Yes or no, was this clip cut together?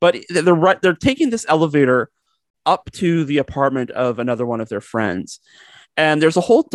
no